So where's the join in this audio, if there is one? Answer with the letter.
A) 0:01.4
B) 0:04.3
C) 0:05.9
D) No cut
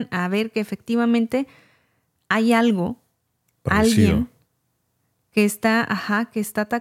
D